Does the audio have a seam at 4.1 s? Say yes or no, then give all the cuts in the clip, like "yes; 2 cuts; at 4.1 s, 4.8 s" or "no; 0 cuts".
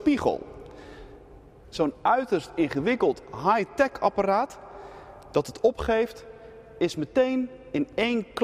no; 1 cut; at 1.6 s